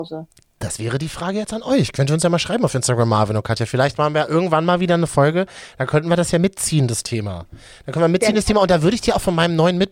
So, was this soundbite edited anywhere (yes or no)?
no